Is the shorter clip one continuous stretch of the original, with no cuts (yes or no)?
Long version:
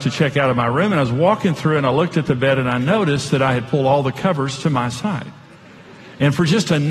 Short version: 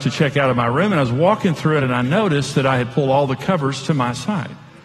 no